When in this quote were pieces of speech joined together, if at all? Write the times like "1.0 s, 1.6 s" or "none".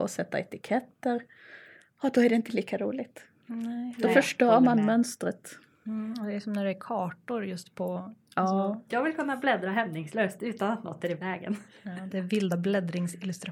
8.9 s